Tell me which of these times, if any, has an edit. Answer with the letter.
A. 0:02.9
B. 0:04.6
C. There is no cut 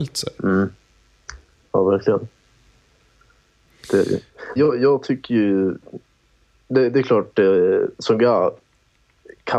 B